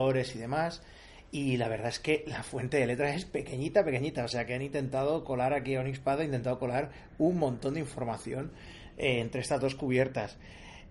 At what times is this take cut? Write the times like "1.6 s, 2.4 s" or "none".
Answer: none